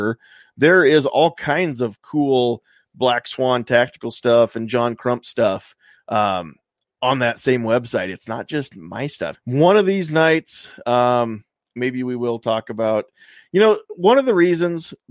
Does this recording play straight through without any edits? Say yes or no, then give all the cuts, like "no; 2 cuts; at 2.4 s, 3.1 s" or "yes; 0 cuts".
no; 1 cut; at 9.4 s